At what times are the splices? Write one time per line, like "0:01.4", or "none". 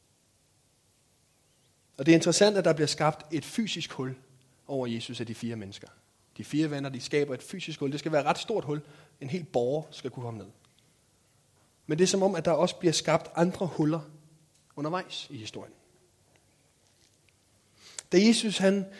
none